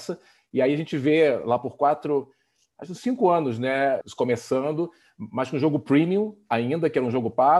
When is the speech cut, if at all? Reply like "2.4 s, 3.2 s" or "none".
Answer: 4.0 s